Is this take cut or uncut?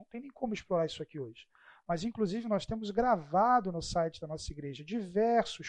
uncut